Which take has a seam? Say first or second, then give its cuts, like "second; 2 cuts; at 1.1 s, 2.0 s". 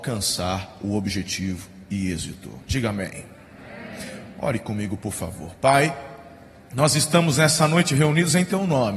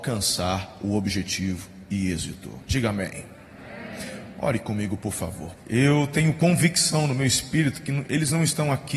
second; 1 cut; at 5.6 s